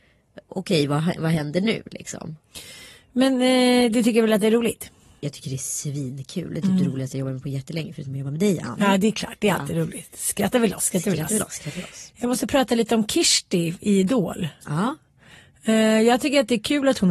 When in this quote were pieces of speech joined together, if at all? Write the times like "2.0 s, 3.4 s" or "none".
none

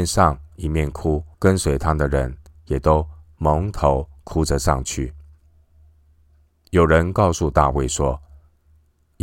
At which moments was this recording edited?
1.3 s

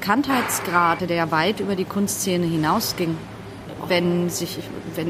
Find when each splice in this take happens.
1.0 s, 3.9 s

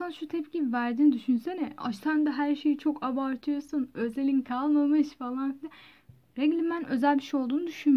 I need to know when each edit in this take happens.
none

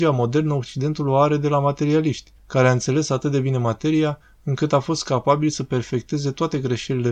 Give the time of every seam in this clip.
2.4 s

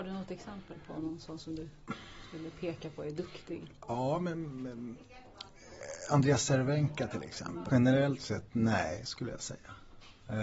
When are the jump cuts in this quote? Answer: 7.7 s

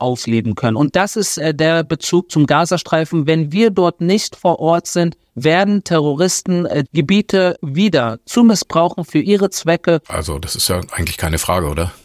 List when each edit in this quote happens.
6.8 s, 10.0 s

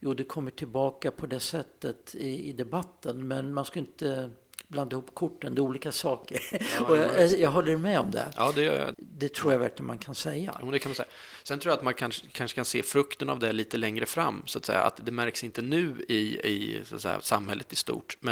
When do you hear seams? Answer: 8.9 s

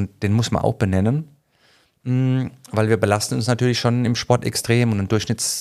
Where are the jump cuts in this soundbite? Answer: none

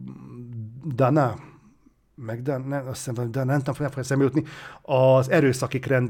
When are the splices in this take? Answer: none

